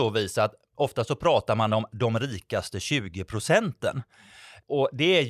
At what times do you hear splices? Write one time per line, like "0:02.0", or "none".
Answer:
none